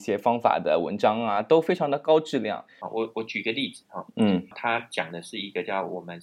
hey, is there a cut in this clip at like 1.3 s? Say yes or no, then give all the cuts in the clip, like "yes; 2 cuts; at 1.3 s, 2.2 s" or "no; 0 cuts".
no; 2 cuts; at 2.8 s, 4.5 s